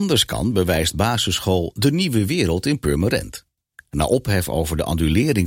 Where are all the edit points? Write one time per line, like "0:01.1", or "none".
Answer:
none